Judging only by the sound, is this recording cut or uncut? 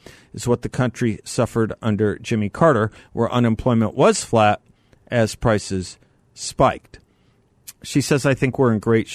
uncut